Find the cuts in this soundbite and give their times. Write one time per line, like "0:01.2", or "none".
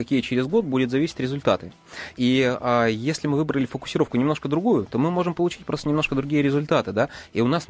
none